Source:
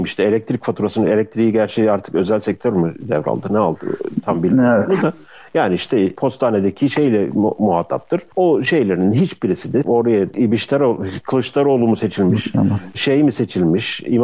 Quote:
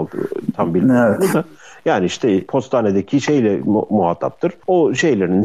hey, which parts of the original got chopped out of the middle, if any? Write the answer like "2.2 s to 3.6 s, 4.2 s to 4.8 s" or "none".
none